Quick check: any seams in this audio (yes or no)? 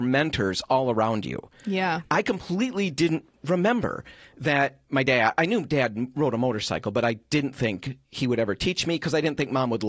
no